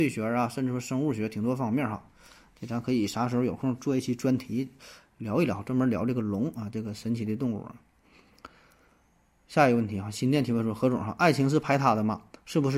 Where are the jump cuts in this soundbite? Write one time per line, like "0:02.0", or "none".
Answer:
none